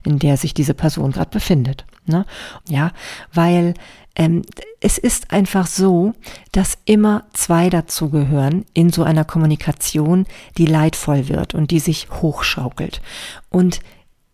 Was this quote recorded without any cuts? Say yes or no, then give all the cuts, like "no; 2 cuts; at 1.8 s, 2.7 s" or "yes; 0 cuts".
no; 1 cut; at 2.6 s